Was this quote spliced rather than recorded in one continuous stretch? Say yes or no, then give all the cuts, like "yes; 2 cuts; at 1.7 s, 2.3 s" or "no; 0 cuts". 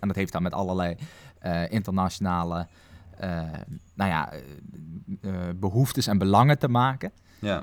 no; 0 cuts